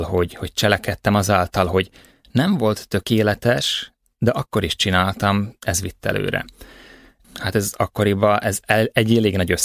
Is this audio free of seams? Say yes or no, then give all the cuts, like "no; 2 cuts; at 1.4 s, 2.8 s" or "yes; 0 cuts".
no; 1 cut; at 7.2 s